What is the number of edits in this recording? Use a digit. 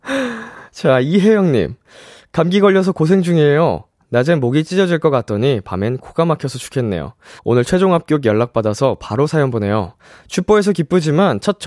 1